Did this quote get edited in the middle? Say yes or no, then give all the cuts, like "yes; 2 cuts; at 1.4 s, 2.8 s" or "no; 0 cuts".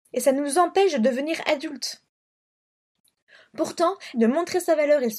yes; 1 cut; at 4.1 s